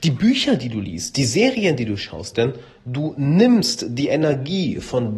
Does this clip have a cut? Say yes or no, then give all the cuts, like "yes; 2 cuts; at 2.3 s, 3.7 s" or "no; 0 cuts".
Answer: yes; 1 cut; at 2.3 s